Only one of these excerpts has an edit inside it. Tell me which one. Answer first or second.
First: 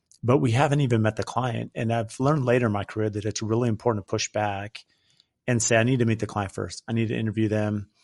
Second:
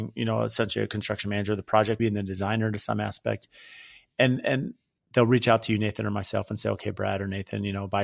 second